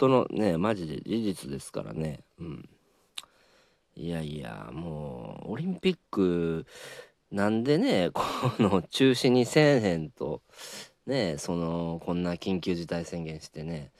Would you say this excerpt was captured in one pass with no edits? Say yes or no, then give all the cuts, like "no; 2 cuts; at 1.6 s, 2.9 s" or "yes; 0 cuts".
yes; 0 cuts